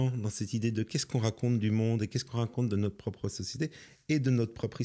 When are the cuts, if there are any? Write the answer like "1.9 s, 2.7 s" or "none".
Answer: none